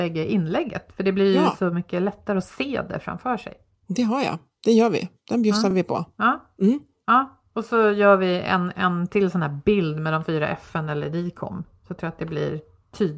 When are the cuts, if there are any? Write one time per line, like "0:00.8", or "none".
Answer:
none